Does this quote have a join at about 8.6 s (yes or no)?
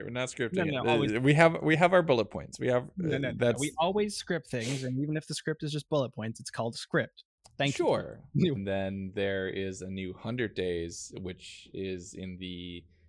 yes